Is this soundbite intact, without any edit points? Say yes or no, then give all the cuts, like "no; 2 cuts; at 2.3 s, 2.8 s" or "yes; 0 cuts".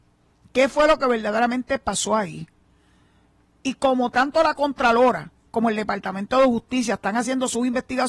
yes; 0 cuts